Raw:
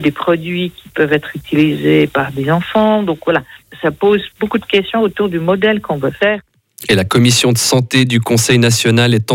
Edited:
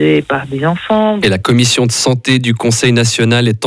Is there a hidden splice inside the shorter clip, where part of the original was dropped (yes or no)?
yes